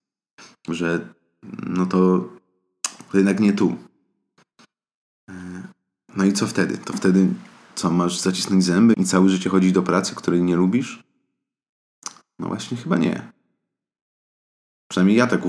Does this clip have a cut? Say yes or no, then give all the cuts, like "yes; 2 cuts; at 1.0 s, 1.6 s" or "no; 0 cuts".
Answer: yes; 1 cut; at 8.9 s